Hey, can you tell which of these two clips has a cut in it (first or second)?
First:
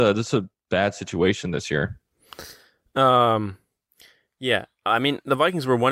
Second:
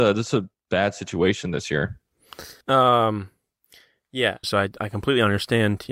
second